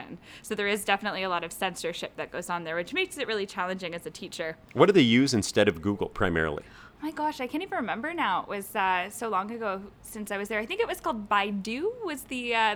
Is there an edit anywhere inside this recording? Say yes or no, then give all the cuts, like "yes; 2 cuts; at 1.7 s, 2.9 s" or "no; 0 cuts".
no; 0 cuts